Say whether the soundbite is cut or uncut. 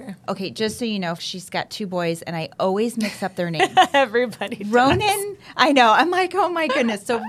cut